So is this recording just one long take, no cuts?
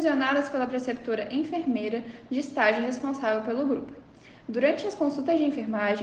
yes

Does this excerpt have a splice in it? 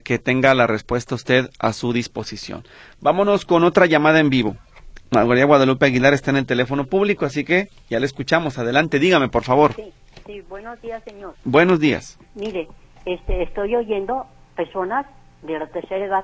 no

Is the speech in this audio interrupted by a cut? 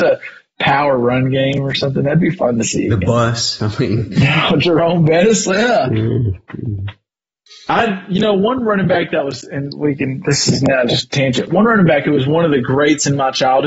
yes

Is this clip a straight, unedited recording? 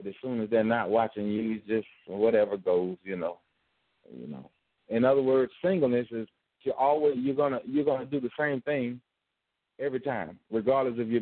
no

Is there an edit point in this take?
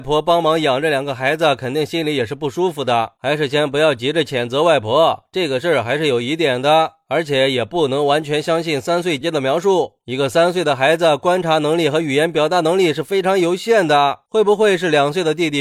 yes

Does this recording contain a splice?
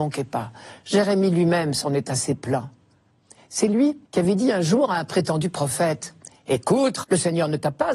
yes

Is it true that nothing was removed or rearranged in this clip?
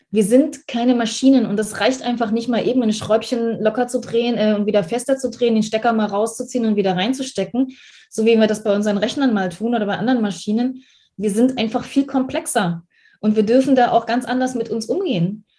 yes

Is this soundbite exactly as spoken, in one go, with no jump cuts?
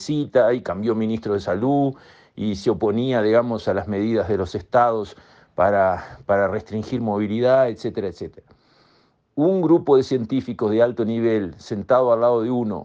yes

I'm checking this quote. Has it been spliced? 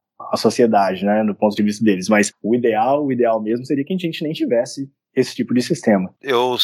no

